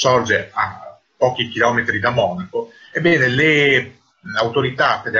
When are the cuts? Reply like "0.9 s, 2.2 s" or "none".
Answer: none